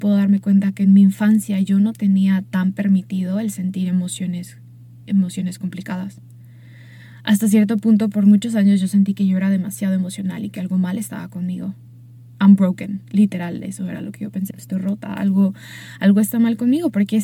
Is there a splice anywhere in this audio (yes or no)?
yes